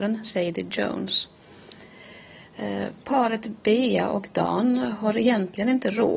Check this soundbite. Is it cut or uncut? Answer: uncut